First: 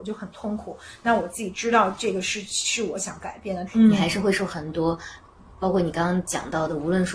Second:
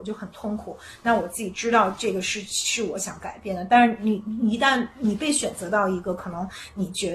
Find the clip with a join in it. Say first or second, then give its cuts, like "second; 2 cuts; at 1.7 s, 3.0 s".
first; 1 cut; at 3.7 s